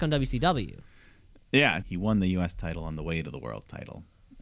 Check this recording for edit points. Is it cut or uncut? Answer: cut